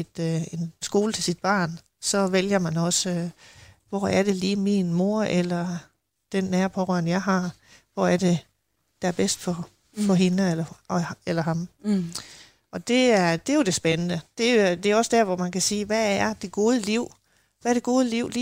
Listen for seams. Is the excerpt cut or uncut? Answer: uncut